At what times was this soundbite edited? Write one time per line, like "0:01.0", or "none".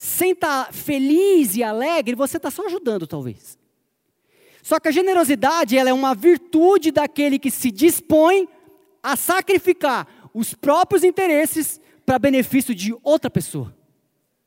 none

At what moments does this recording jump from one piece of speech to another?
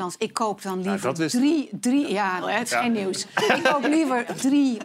0:02.4

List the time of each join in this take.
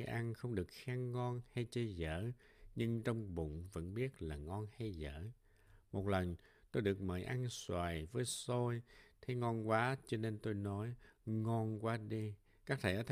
none

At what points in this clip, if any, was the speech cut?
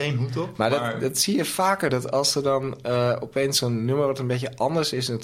none

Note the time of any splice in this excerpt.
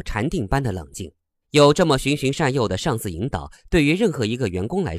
0:01.4

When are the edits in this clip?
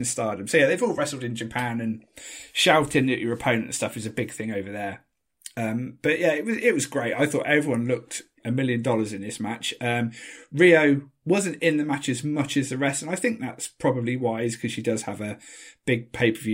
none

